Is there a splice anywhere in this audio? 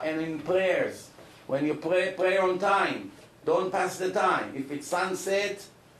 no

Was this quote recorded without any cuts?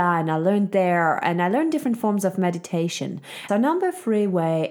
no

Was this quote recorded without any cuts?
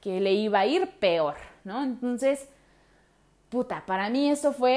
yes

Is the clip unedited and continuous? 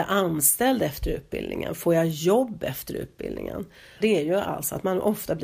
no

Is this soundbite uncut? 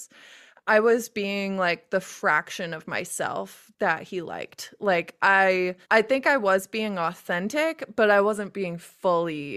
no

